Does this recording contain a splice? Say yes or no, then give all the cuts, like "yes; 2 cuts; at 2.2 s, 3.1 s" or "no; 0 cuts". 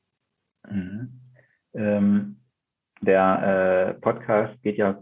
no; 0 cuts